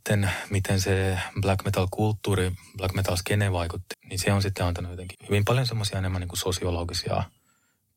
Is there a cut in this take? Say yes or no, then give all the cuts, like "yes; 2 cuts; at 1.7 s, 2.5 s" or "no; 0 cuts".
yes; 2 cuts; at 3.9 s, 5.1 s